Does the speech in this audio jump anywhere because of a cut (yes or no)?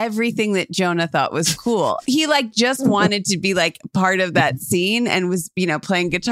yes